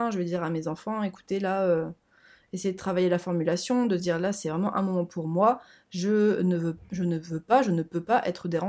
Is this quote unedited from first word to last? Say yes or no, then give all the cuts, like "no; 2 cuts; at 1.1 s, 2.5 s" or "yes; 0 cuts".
yes; 0 cuts